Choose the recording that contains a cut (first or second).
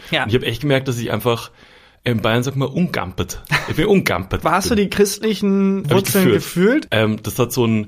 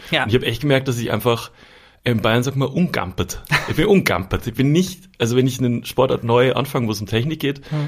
first